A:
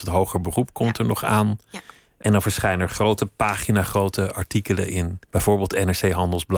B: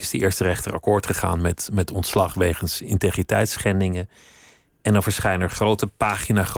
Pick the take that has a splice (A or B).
A